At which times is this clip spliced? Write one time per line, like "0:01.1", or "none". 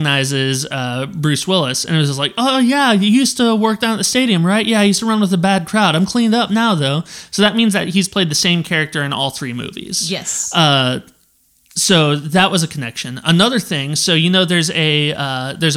none